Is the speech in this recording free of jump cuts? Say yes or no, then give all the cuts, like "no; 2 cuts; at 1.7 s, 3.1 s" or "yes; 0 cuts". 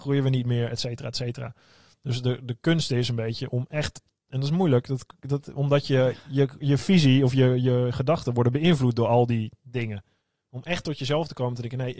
yes; 0 cuts